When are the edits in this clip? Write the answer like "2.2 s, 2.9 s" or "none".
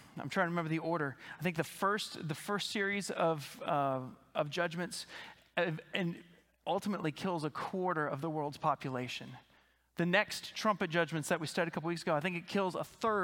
none